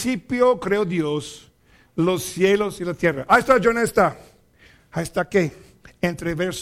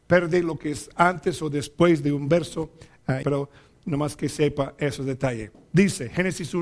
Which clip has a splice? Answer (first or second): second